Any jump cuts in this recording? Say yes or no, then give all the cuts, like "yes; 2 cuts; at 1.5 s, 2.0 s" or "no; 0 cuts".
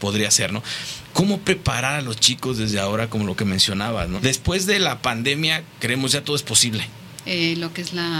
yes; 2 cuts; at 4.2 s, 7.2 s